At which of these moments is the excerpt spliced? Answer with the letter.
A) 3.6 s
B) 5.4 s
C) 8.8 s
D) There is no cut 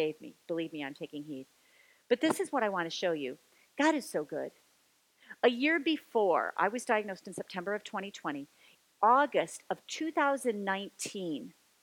C